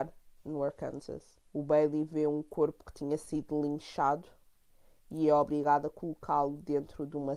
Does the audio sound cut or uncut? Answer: cut